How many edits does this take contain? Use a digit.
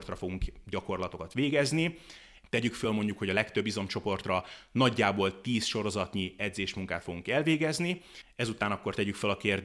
1